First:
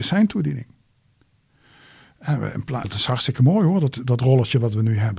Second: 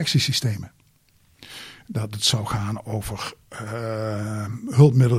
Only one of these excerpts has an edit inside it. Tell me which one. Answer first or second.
first